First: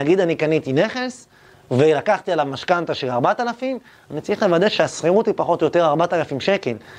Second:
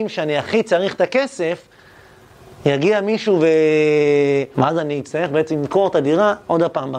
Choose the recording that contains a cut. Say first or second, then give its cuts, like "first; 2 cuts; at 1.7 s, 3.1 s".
second; 1 cut; at 4.5 s